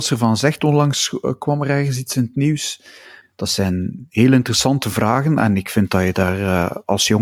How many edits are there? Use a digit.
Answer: 1